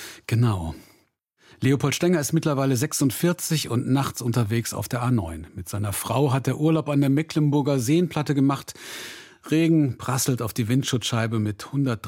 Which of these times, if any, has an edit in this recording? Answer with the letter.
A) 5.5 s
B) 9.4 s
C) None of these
C